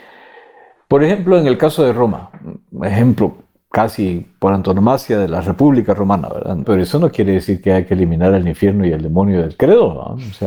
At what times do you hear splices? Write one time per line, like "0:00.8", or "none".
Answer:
0:06.6